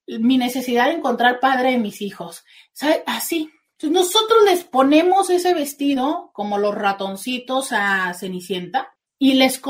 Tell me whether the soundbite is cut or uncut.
uncut